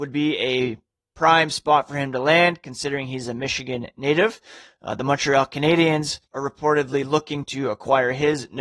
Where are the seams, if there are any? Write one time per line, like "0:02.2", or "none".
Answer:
0:06.3